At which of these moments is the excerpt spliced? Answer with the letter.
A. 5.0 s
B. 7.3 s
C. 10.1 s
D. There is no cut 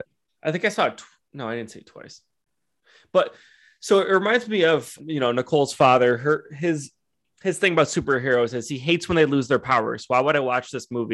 A